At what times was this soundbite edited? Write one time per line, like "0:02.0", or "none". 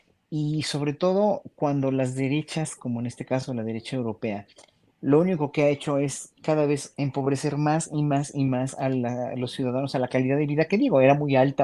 none